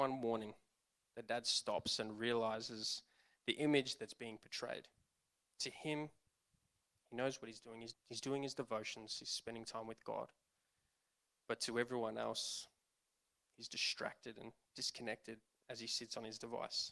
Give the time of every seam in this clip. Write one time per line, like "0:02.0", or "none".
0:07.9